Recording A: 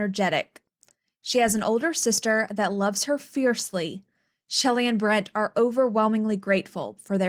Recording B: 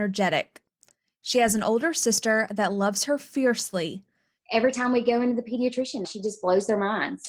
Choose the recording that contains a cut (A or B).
B